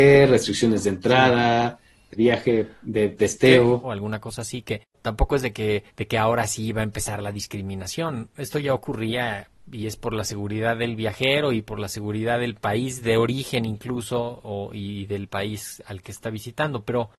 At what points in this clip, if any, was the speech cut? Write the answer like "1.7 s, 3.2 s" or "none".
2.1 s, 3.8 s, 5.9 s